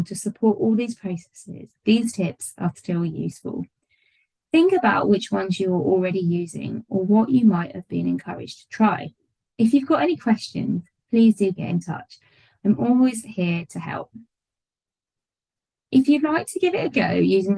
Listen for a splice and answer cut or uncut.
cut